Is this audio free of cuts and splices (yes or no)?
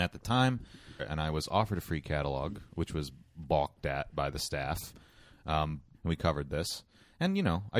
no